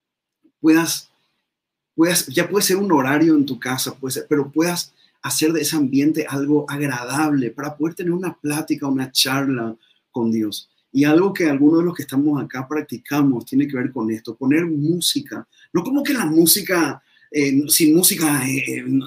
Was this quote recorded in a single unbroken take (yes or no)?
no